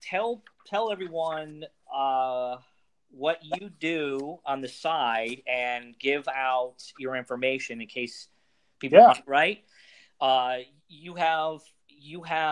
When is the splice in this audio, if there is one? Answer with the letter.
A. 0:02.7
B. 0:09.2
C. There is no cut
B